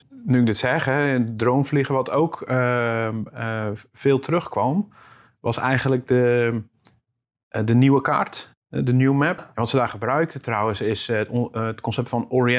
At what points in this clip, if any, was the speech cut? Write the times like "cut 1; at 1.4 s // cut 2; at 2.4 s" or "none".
cut 1; at 9.4 s